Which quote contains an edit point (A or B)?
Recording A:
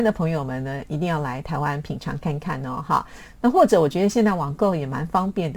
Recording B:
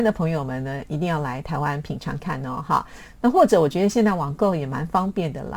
B